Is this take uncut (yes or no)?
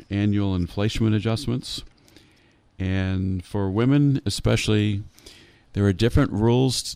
no